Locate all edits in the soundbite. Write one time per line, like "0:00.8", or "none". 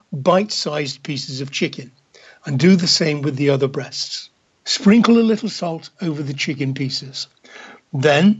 none

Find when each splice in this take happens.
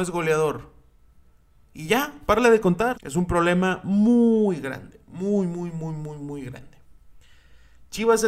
0:02.9

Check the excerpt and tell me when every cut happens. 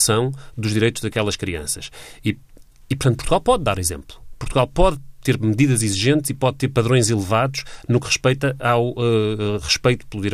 none

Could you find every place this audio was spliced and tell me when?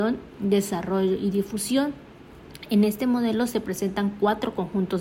none

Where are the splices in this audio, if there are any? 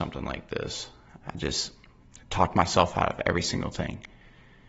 0:01.2

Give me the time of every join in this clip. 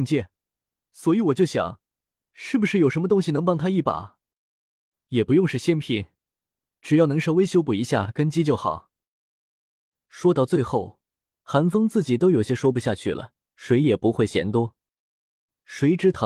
0:13.5

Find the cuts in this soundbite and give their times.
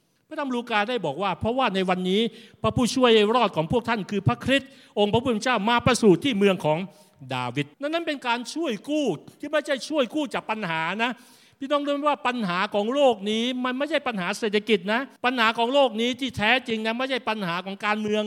0:07.7
0:15.2

